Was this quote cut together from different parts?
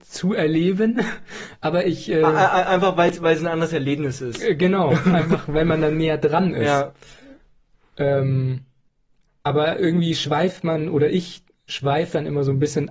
no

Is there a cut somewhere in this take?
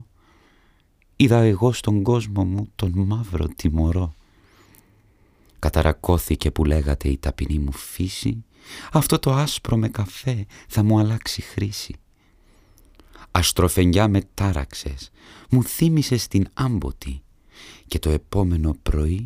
no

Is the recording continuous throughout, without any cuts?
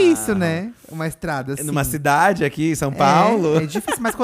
yes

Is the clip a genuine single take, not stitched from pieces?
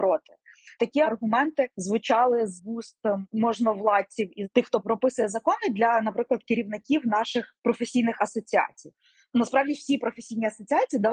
yes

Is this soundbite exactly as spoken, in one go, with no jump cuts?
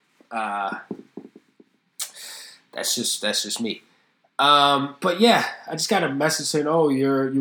yes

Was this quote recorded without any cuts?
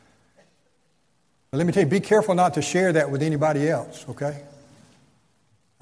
yes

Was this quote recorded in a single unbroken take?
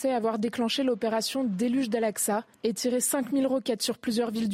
no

